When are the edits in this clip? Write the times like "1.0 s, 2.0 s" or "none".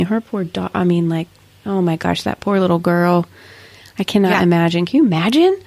none